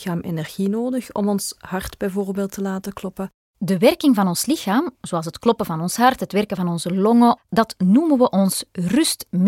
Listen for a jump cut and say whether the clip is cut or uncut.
cut